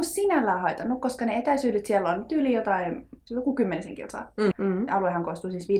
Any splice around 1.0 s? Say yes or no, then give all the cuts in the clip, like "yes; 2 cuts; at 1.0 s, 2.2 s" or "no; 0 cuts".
no; 2 cuts; at 3.3 s, 4.5 s